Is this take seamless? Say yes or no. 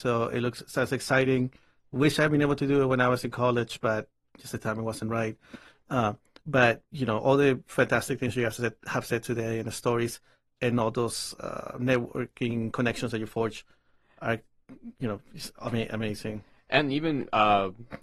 yes